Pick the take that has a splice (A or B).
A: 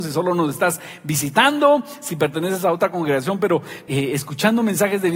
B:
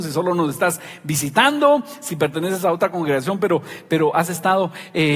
A